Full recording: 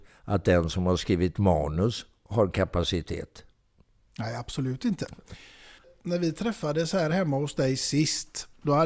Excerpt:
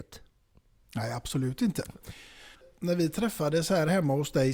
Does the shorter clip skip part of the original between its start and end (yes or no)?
no